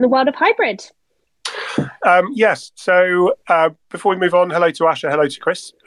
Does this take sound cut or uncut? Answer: cut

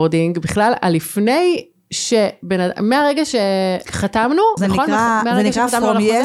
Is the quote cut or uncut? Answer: cut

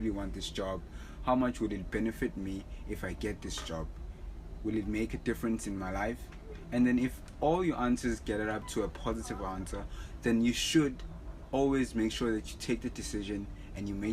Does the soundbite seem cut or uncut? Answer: uncut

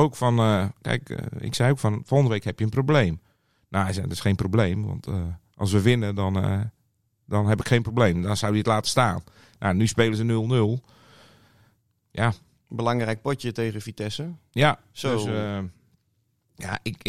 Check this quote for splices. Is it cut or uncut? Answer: uncut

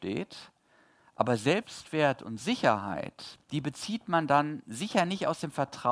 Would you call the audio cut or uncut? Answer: uncut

